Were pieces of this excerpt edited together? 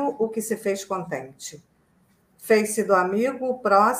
no; 0 cuts

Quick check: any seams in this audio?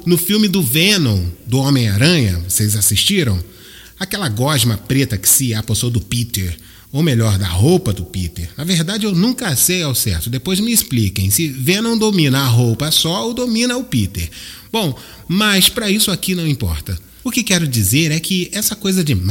no; 0 cuts

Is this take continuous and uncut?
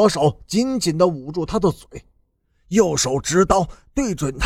yes; 0 cuts

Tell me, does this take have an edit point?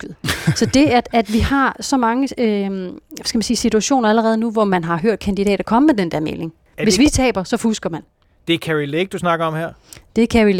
no; 0 cuts

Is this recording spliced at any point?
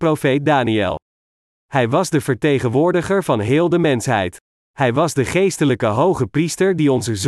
no; 0 cuts

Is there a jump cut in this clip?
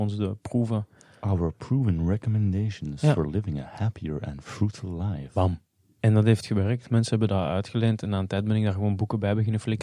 no; 0 cuts

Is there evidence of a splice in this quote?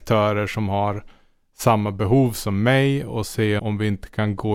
yes; 1 cut; at 3.6 s

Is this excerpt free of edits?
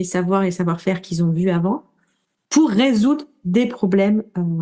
yes; 0 cuts

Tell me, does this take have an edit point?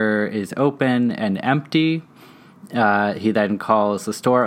no; 0 cuts

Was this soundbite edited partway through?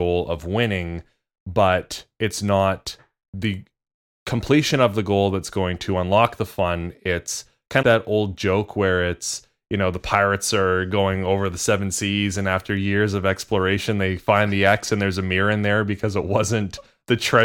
yes; 1 cut; at 7.8 s

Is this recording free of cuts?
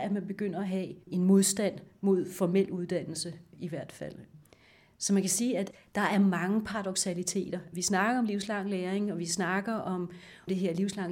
no; 1 cut; at 1.0 s

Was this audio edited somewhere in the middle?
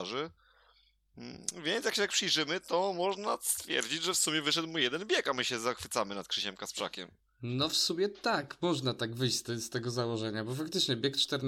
no; 0 cuts

